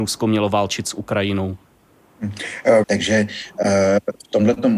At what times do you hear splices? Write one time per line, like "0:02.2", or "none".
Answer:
0:02.8